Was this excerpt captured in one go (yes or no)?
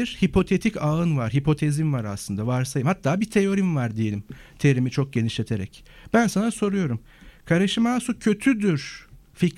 yes